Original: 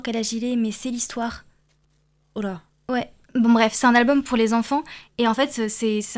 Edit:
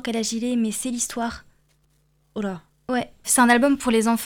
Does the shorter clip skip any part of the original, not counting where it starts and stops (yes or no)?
yes